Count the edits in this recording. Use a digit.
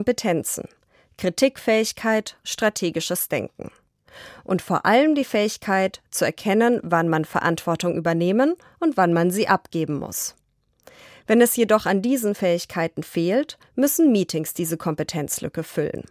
1